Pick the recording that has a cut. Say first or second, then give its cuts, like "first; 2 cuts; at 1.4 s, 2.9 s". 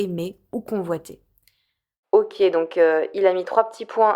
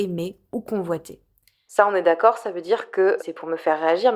second; 2 cuts; at 1.7 s, 3.2 s